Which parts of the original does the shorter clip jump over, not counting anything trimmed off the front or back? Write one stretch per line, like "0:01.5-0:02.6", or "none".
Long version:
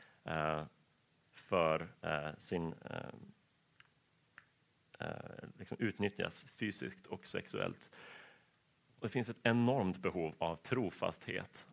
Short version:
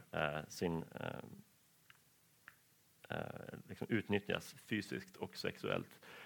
none